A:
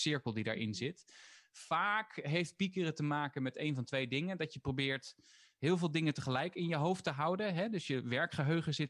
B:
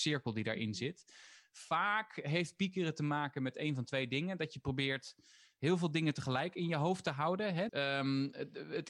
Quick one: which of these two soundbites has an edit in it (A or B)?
B